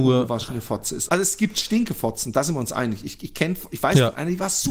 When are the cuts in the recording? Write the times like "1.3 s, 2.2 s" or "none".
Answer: 1.1 s